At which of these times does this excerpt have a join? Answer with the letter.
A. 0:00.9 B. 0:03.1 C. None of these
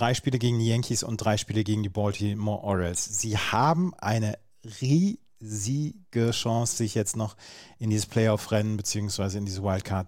C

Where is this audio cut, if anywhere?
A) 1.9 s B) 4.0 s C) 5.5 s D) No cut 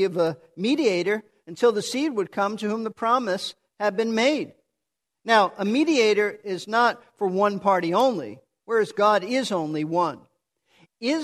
D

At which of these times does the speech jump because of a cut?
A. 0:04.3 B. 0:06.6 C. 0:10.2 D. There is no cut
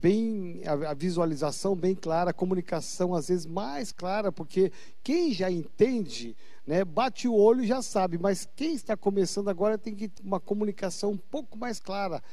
C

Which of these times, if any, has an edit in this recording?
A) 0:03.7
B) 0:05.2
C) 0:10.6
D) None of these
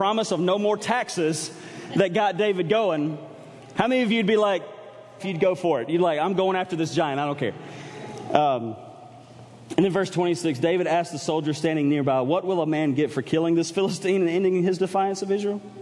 B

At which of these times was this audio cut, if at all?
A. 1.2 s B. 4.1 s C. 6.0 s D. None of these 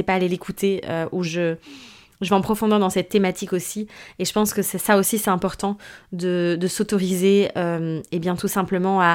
A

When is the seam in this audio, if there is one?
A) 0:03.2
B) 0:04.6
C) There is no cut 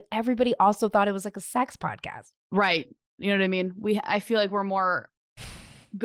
A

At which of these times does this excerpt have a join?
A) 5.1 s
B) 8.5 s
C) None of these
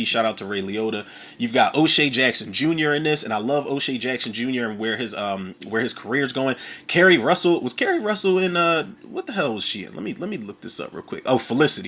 C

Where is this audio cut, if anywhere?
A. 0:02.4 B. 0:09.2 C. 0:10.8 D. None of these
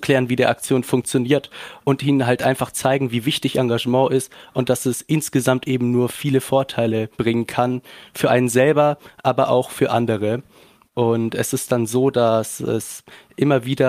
D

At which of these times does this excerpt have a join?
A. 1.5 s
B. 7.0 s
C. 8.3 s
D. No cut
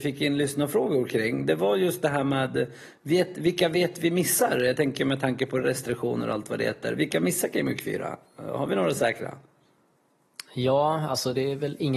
D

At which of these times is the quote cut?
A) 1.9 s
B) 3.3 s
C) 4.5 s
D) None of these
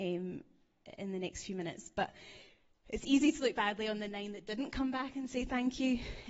D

